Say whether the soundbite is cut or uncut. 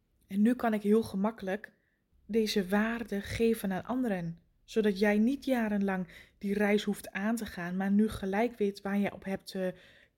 uncut